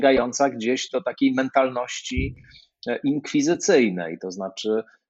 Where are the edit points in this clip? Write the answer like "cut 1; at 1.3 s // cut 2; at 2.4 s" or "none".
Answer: none